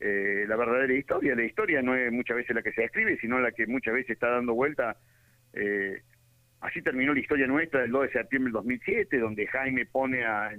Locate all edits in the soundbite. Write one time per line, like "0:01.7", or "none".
none

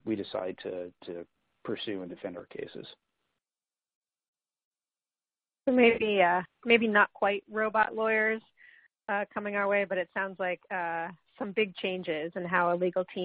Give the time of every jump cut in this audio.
none

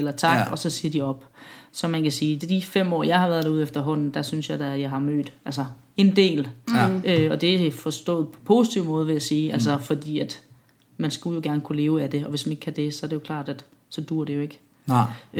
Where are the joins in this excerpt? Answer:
none

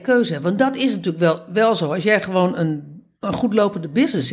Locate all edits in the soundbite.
none

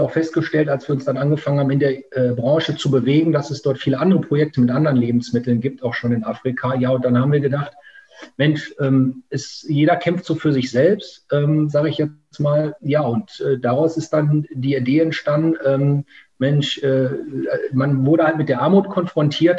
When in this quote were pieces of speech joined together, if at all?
0:12.8

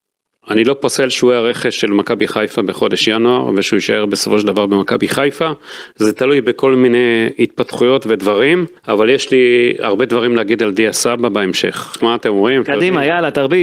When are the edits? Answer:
0:08.8
0:12.0

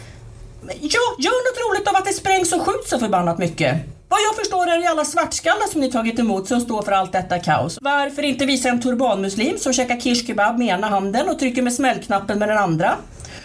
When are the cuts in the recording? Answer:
0:07.8

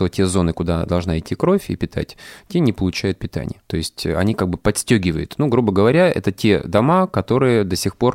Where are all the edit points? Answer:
0:03.6

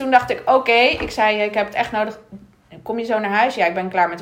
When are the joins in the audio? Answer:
none

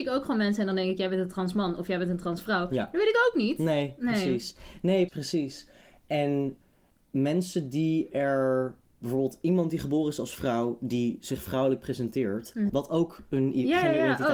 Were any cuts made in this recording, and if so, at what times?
0:05.1
0:12.7

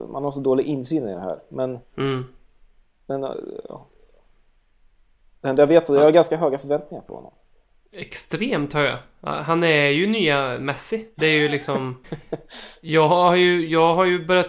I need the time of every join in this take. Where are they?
0:12.0

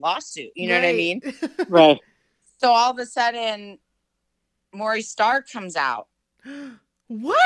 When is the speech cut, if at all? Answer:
none

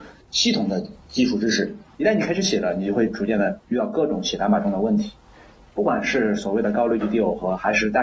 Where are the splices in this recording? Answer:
0:01.9

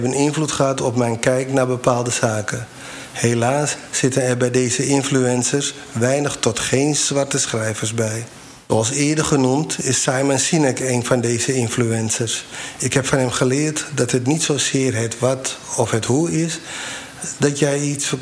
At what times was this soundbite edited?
none

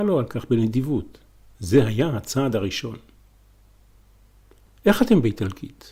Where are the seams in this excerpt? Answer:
none

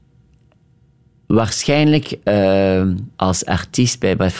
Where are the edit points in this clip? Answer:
0:03.1

